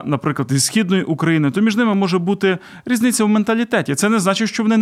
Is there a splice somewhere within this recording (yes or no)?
no